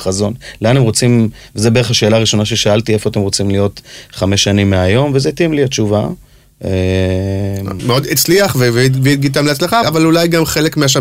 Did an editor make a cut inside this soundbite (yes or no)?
yes